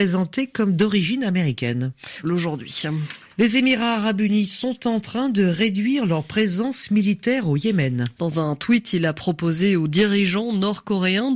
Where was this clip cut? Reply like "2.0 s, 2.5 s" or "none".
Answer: 2.2 s, 8.2 s